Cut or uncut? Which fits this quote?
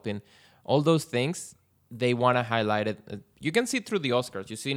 uncut